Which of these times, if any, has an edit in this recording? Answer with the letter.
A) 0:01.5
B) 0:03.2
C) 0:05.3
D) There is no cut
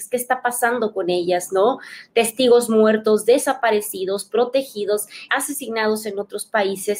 C